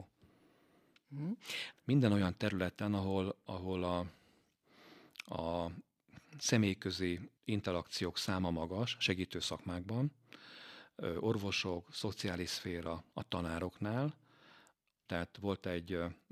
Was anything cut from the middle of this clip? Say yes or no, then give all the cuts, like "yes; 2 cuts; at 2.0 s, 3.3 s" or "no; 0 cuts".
yes; 3 cuts; at 1.7 s, 7.4 s, 15.1 s